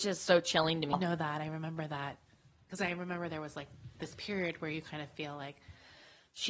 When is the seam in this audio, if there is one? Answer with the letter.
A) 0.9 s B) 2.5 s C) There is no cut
A